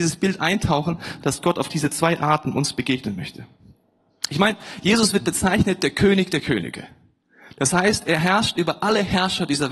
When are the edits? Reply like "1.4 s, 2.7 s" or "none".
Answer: 1.2 s